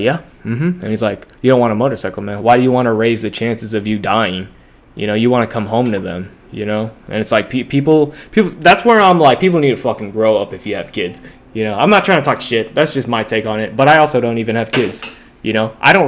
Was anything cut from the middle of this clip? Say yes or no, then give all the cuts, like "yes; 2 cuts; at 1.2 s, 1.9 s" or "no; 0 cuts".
yes; 1 cut; at 1.3 s